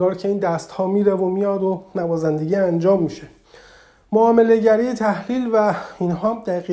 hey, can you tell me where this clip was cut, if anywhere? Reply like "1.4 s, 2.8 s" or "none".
none

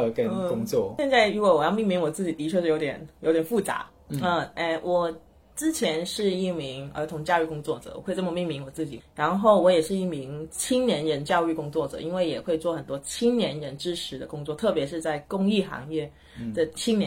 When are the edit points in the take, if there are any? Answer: 9.0 s

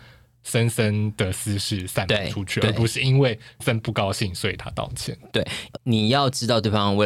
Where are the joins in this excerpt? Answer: 3.6 s

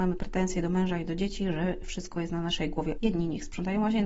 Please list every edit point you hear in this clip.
2.9 s

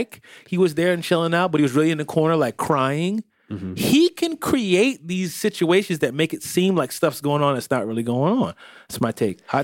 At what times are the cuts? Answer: none

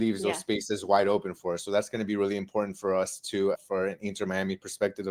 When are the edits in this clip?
3.5 s

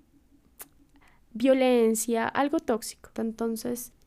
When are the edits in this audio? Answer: 3.2 s

